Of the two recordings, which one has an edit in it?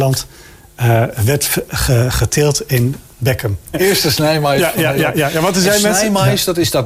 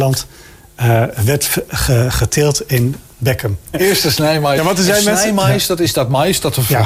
second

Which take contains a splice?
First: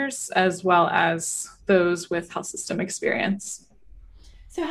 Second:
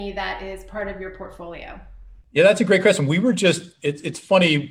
second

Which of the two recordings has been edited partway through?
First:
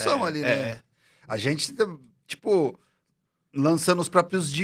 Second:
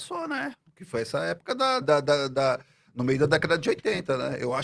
second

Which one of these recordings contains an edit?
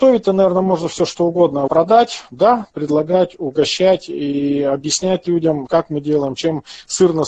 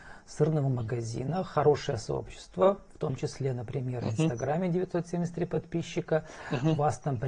first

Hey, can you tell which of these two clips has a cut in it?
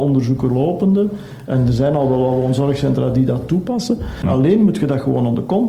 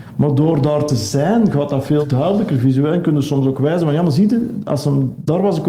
first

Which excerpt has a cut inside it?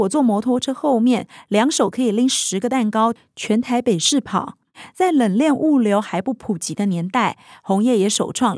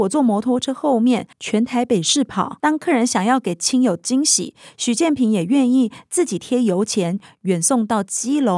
second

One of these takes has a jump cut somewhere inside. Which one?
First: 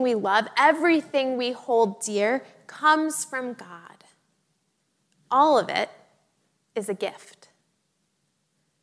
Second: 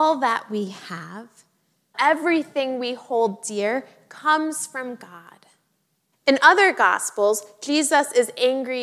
second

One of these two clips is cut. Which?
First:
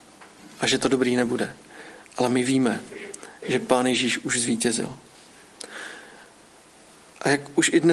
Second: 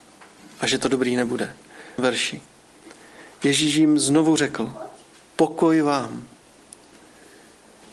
second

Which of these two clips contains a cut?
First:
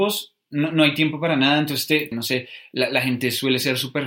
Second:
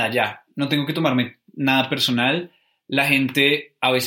first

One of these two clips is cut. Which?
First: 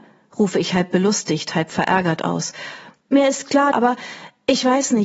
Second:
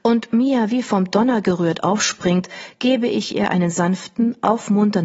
first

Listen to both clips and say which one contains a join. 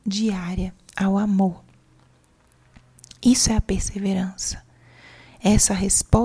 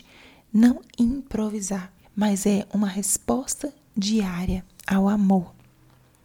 second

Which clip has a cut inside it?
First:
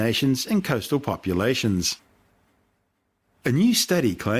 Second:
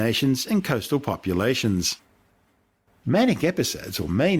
second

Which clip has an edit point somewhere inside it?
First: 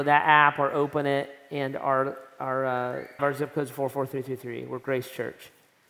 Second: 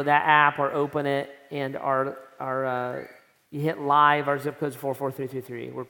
first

